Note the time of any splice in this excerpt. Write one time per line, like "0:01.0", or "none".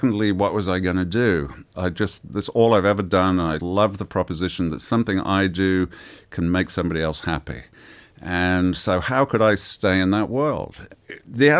0:01.7
0:03.6